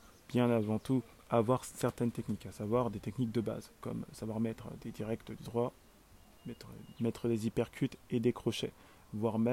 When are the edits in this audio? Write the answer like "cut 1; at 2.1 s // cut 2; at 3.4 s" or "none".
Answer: cut 1; at 4.8 s // cut 2; at 6.9 s